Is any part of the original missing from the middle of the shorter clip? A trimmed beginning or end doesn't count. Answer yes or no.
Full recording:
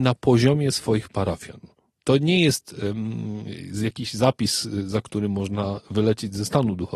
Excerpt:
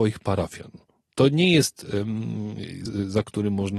yes